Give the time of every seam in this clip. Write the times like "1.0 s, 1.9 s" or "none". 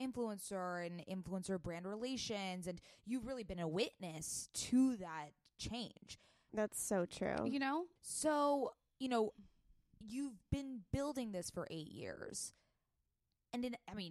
6.5 s, 8.0 s